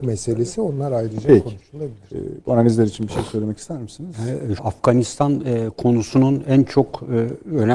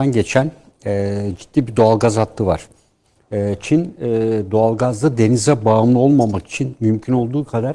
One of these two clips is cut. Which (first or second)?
first